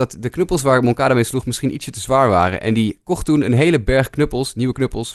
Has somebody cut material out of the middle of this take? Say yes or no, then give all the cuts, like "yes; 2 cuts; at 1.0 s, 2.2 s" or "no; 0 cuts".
no; 0 cuts